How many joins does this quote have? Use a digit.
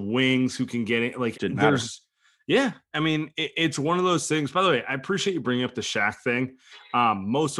1